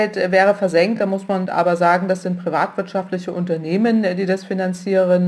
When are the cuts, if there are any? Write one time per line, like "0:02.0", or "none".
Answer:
none

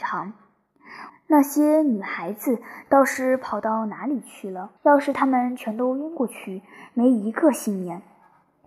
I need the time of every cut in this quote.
0:01.1
0:04.8

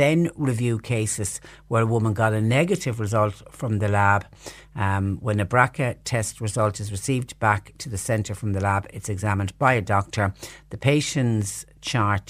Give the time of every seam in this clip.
none

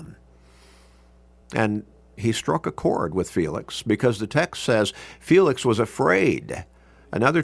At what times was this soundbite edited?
none

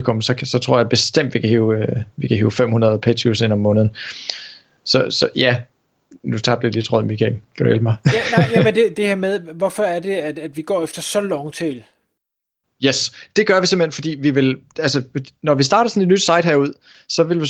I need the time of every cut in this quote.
0:08.9

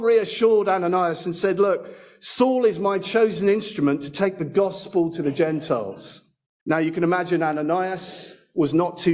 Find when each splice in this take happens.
0:06.6

